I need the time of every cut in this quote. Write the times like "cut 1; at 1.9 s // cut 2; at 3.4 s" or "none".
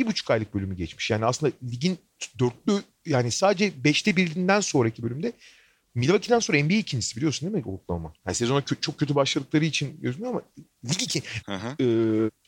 cut 1; at 8.2 s // cut 2; at 11.4 s